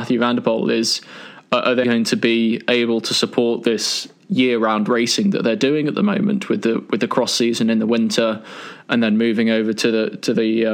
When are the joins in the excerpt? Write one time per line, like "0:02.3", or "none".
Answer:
0:01.8